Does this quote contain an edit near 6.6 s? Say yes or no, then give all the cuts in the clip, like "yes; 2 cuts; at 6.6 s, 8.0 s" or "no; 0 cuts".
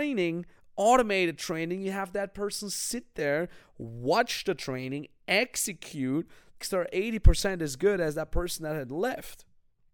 yes; 1 cut; at 6.6 s